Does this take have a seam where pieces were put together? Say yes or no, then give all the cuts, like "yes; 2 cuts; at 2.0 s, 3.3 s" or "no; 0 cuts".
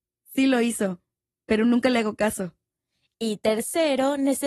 no; 0 cuts